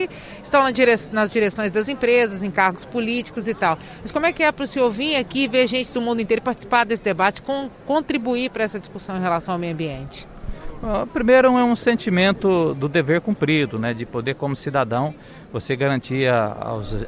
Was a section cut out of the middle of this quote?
no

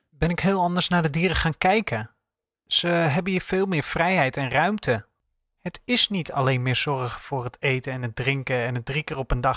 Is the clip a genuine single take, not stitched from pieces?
yes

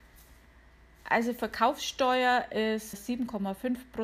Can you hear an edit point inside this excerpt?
yes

